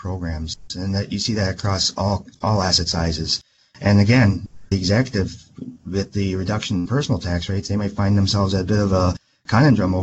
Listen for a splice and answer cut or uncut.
cut